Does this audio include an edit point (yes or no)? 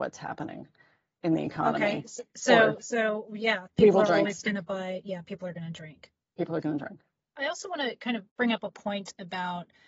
yes